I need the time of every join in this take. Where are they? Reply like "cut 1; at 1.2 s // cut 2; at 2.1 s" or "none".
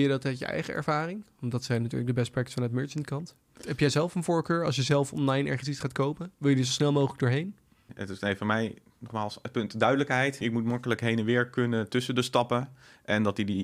cut 1; at 7.9 s // cut 2; at 10.4 s